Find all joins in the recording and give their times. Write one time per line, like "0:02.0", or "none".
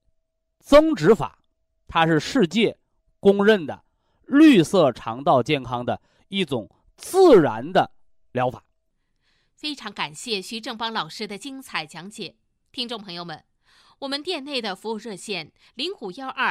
none